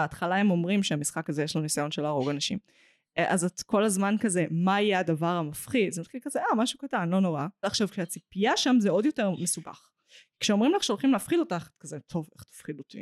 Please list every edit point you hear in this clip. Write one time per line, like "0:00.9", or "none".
0:07.6

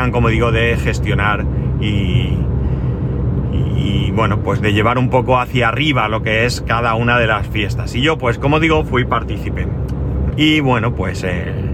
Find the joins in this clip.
0:10.3

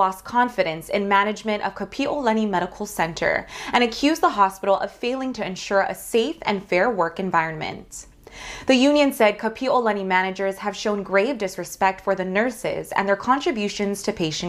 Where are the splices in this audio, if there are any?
none

